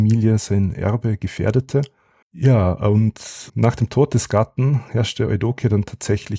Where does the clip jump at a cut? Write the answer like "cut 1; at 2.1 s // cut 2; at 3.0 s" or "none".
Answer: cut 1; at 2.2 s // cut 2; at 3.5 s